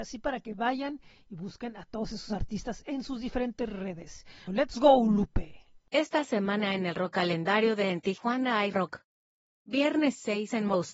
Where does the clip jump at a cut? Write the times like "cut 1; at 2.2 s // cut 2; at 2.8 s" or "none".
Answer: cut 1; at 4.5 s